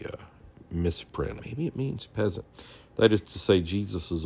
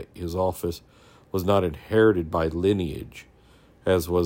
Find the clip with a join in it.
first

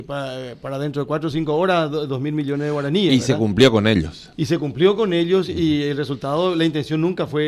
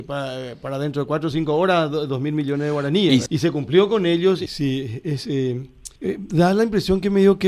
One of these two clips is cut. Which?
second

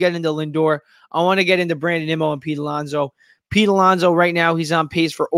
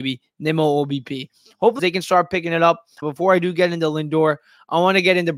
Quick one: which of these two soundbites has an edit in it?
second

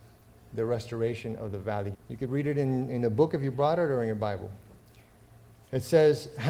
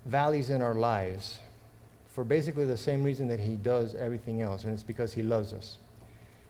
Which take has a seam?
first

